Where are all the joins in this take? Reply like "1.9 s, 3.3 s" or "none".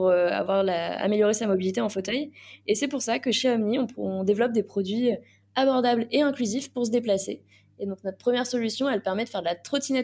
none